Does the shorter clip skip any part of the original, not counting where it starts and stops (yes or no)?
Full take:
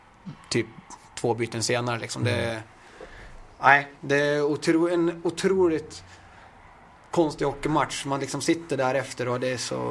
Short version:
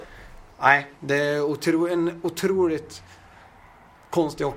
no